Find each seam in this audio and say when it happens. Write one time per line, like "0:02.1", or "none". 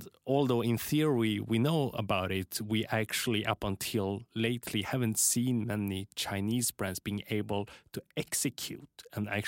none